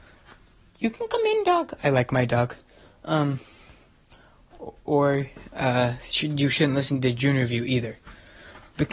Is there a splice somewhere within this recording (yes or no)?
no